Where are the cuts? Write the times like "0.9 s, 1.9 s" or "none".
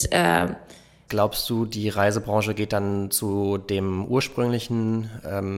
1.1 s